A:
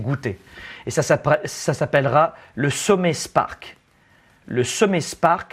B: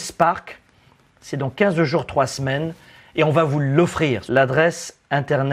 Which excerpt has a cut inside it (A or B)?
B